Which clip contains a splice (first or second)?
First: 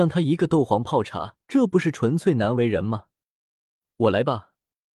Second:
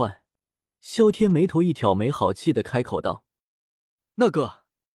first